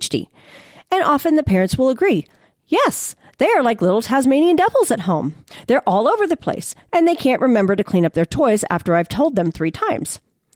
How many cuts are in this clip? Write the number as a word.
one